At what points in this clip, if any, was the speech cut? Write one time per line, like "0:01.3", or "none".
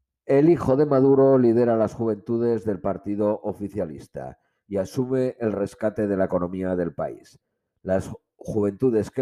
none